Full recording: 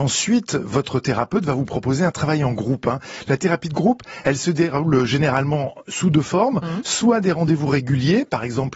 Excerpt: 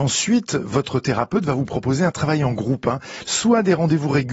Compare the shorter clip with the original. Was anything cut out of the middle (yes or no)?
yes